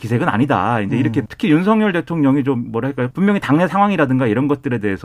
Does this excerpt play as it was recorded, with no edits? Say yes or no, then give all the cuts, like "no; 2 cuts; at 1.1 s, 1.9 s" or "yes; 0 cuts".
no; 2 cuts; at 1.3 s, 3.1 s